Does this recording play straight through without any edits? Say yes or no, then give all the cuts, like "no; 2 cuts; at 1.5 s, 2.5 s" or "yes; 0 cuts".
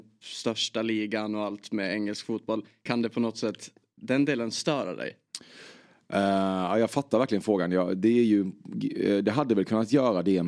yes; 0 cuts